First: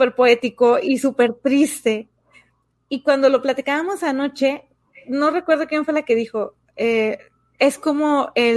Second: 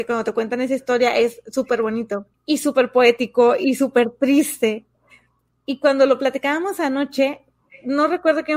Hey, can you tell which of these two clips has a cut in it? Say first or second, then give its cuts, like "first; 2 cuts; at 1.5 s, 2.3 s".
second; 1 cut; at 2.3 s